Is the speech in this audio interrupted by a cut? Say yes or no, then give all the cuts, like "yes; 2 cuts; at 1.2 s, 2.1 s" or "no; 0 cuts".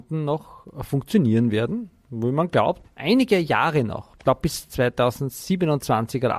no; 0 cuts